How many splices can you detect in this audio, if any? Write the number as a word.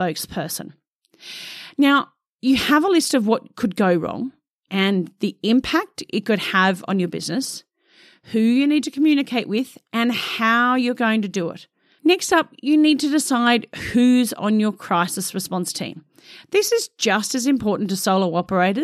one